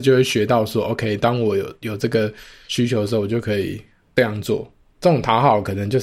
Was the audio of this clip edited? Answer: no; 0 cuts

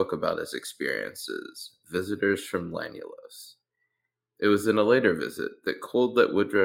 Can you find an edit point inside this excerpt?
no; 0 cuts

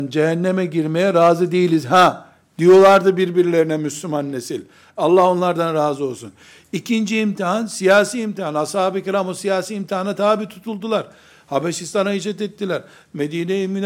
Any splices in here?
no; 0 cuts

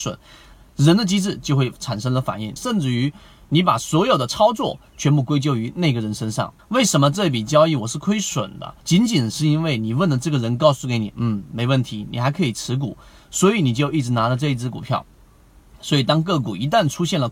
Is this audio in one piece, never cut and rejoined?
no; 3 cuts; at 2.6 s, 6.6 s, 8.8 s

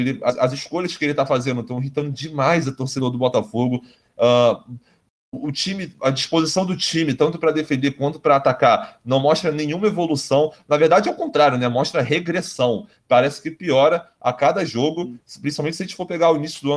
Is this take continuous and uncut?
yes; 0 cuts

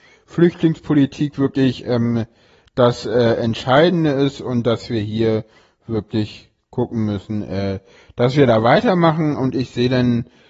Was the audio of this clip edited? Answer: no; 0 cuts

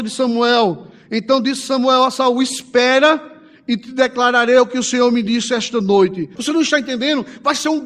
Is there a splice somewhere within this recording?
yes; 1 cut; at 6.4 s

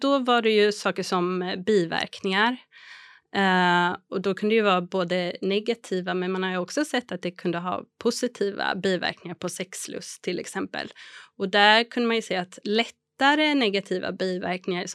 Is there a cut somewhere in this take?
no; 0 cuts

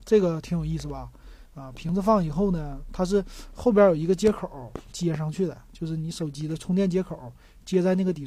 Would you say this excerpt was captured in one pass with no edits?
no; 1 cut; at 1.4 s

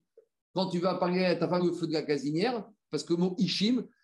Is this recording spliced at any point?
yes; 2 cuts; at 1.6 s, 2.9 s

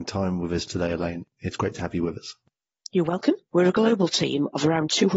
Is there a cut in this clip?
yes; 1 cut; at 3.5 s

